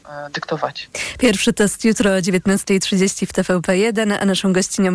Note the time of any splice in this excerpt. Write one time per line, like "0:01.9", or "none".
none